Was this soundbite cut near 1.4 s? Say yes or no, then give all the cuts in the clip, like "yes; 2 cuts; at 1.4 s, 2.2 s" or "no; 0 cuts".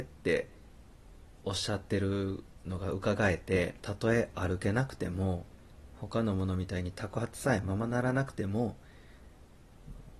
no; 1 cut; at 3.8 s